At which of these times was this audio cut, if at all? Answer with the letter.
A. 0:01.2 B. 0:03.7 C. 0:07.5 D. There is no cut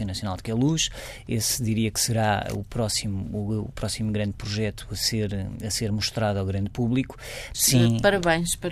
C